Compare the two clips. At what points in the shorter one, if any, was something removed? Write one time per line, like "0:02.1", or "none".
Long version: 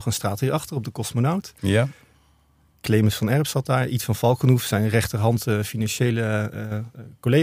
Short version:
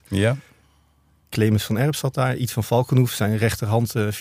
none